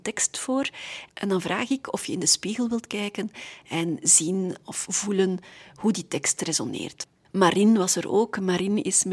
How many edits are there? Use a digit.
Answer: 0